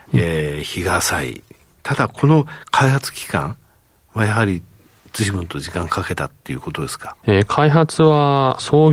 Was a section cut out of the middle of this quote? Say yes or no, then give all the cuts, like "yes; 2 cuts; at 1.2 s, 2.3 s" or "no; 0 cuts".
no; 0 cuts